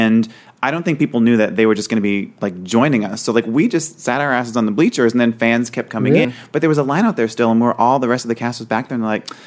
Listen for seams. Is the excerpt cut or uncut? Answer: cut